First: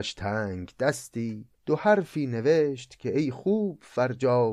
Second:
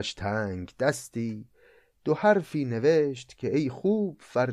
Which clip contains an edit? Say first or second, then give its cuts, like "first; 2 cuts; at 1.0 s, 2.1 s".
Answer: first; 1 cut; at 1.5 s